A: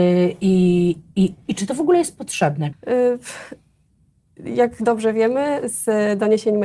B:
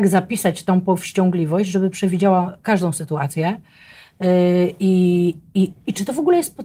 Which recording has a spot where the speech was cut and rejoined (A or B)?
A